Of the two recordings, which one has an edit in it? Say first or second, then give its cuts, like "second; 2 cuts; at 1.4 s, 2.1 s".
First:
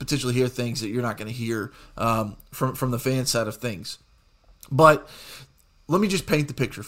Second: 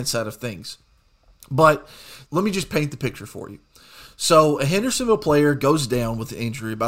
second; 1 cut; at 2.3 s